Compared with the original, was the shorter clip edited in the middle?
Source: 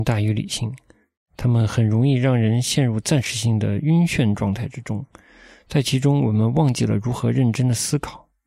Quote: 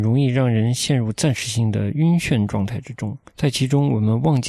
yes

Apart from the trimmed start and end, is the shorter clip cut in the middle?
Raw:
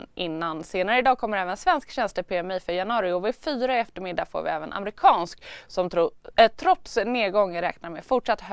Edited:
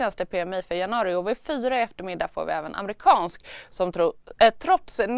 no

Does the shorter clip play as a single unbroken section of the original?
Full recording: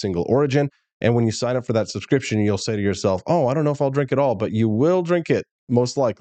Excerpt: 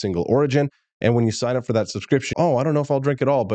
no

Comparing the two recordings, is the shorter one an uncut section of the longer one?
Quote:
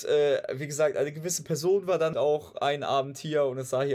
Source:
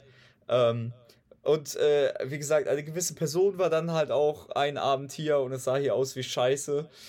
no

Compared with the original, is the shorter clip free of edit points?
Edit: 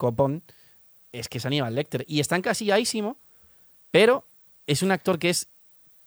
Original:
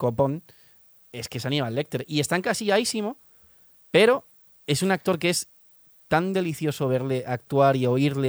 yes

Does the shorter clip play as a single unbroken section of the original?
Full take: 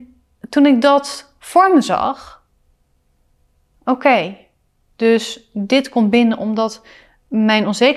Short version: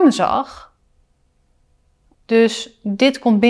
no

